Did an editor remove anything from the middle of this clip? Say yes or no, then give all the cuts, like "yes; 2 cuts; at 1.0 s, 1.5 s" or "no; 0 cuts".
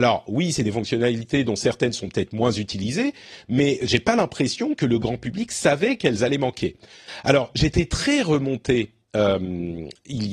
no; 0 cuts